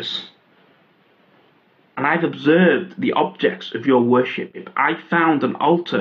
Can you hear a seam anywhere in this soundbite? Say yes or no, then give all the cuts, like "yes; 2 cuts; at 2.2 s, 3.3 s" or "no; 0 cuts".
no; 0 cuts